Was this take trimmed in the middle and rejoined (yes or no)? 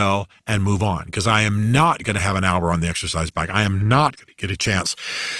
no